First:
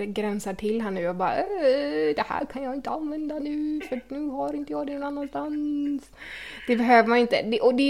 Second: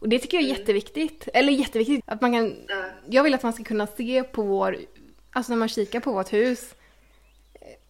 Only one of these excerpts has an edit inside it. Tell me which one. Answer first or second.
second